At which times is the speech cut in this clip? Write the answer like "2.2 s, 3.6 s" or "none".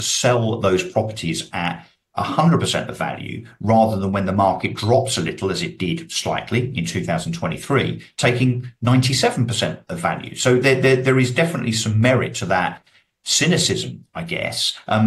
none